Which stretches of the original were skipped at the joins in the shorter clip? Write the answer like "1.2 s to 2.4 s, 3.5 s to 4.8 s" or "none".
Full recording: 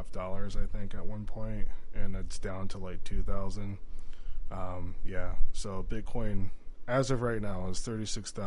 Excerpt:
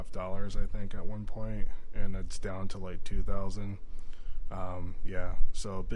none